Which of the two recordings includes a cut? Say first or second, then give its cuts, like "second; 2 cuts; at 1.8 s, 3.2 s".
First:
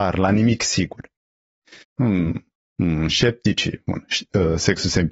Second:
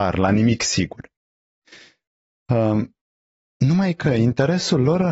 first; 1 cut; at 1.8 s